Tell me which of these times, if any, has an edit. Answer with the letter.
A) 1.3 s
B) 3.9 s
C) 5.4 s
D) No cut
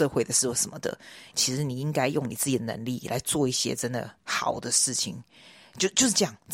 A